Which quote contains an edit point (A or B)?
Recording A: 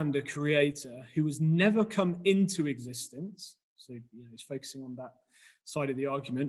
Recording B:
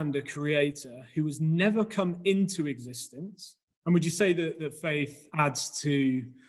B